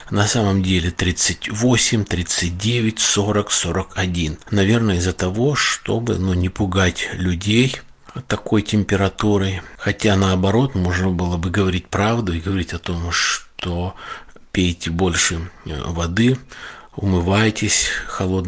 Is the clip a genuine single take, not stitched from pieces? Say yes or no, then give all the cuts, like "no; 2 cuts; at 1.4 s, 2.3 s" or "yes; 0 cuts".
yes; 0 cuts